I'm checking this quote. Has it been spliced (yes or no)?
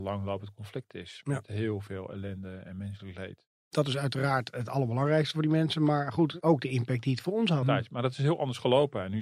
yes